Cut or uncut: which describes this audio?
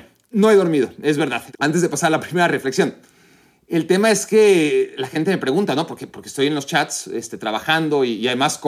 cut